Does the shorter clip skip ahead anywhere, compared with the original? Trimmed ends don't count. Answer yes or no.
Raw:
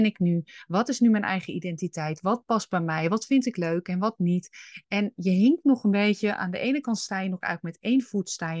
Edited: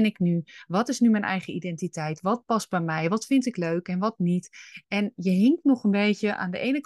no